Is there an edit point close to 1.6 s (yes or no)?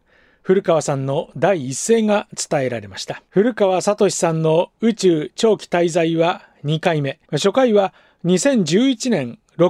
no